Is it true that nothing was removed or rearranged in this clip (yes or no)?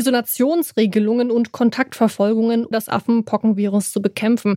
no